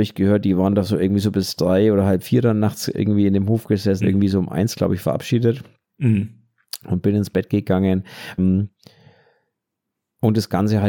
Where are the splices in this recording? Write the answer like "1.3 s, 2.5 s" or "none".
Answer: 4.0 s, 8.4 s